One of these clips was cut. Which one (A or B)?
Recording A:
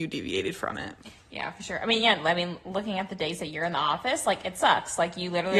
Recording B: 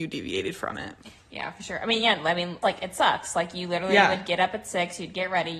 B